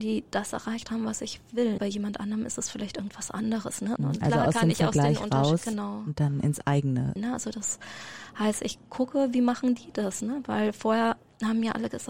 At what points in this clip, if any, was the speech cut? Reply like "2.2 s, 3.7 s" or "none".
1.8 s, 4.0 s, 7.2 s